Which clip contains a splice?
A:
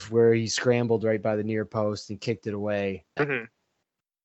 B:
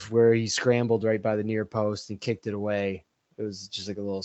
A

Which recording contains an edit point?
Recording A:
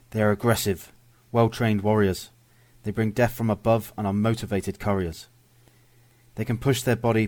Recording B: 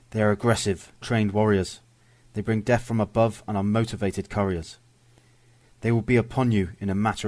B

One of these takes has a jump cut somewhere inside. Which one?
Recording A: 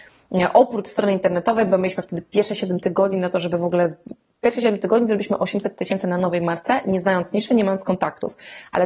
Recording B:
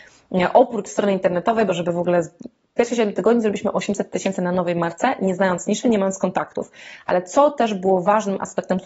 B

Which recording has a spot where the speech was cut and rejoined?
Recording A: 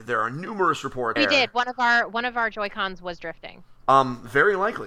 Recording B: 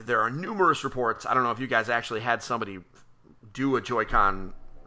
A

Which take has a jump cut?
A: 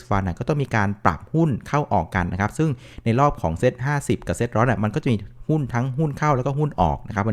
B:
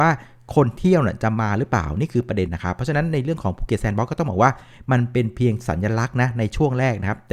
B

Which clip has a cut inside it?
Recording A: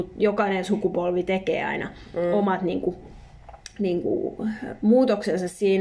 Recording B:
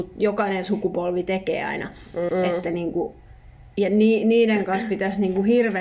B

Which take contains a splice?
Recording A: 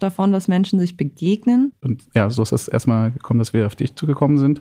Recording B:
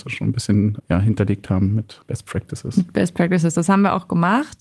A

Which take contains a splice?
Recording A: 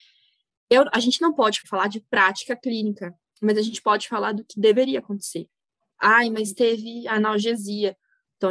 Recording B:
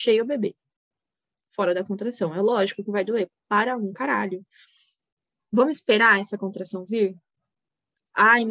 A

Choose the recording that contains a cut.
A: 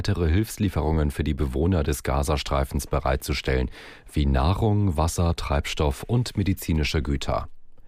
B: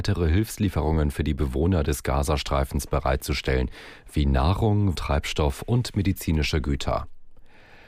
B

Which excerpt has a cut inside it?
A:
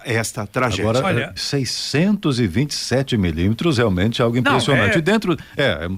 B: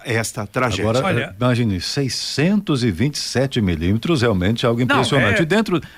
A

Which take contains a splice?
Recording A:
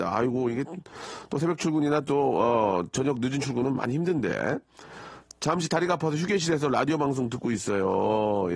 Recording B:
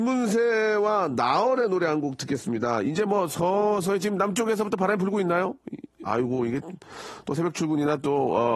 B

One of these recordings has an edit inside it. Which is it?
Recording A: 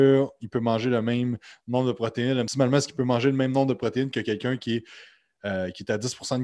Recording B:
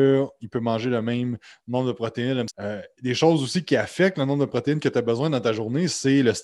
B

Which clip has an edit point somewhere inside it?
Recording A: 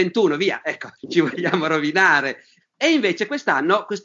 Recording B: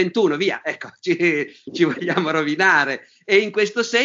A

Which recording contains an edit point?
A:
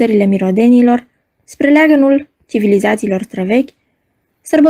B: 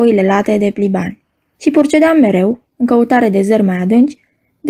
B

